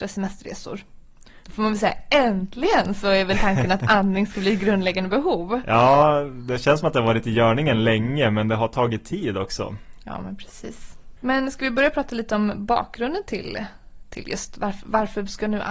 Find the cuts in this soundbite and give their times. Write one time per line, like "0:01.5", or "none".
0:01.4
0:11.2